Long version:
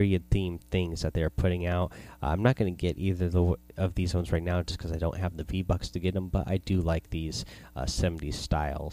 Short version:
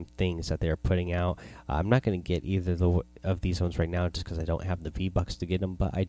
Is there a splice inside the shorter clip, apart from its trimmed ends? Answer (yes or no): no